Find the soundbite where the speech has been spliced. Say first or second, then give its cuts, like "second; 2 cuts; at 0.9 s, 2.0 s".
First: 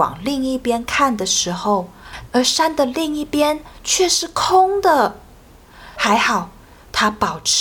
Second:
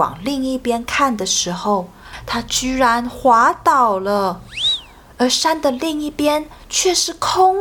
first; 2 cuts; at 2.3 s, 6.0 s